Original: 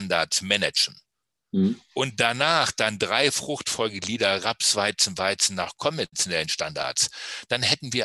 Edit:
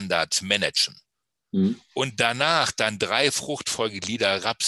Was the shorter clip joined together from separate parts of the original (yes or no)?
no